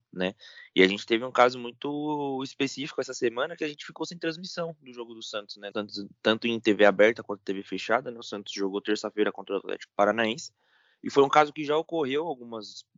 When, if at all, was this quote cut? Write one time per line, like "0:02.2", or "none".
0:05.7